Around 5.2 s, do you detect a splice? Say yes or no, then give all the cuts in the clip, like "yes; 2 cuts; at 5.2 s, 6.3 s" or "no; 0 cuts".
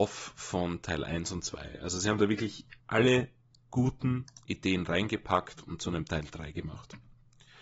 no; 1 cut; at 2.8 s